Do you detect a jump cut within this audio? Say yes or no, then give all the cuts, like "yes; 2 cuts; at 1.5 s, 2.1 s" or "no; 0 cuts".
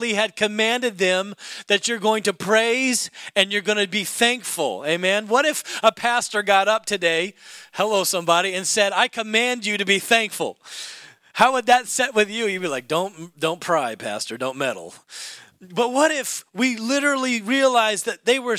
no; 0 cuts